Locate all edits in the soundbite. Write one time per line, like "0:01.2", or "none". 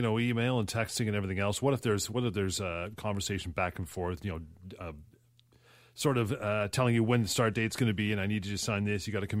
none